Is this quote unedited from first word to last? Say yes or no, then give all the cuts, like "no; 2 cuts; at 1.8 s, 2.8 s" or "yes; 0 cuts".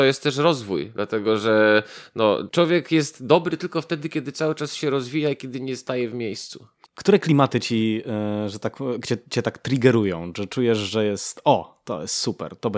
no; 1 cut; at 6.8 s